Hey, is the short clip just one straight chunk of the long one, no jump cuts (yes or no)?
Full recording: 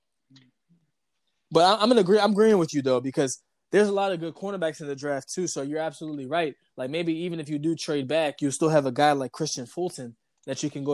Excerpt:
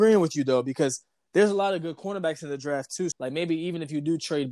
no